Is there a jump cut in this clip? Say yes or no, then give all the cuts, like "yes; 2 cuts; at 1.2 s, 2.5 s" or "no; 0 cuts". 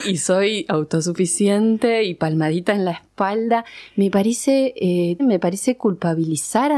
yes; 1 cut; at 5.2 s